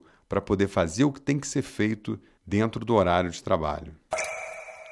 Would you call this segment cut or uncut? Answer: uncut